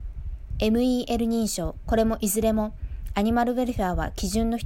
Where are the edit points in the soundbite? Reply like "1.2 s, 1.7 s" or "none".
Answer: 1.8 s